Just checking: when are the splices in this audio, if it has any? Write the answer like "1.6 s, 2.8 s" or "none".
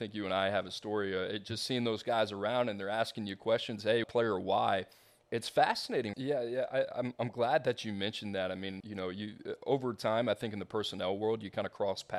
4.0 s, 6.1 s, 8.8 s